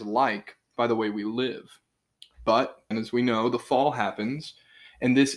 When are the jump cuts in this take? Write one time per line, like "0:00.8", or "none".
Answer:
0:02.9